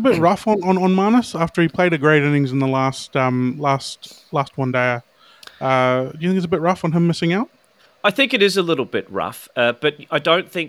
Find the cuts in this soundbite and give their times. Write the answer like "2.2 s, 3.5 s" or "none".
none